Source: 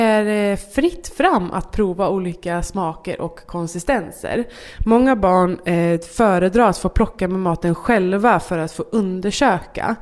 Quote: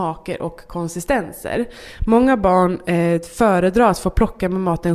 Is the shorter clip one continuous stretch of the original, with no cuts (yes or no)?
yes